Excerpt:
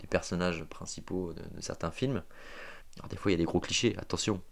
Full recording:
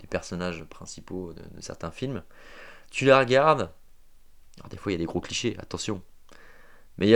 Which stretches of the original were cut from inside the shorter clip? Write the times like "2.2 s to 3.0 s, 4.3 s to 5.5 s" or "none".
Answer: 2.8 s to 4.4 s